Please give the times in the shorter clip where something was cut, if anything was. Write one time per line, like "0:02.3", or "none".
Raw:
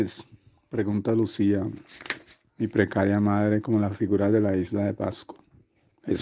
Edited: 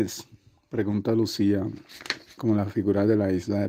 0:02.4